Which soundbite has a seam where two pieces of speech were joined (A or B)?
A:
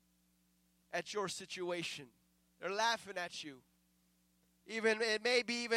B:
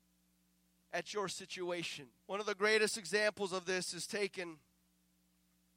B